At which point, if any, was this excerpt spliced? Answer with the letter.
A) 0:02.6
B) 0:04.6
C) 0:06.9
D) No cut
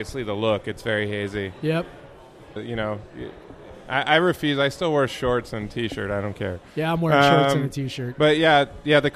A